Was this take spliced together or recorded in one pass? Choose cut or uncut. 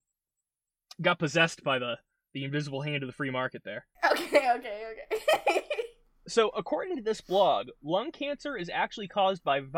uncut